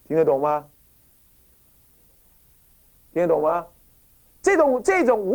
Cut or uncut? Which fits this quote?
uncut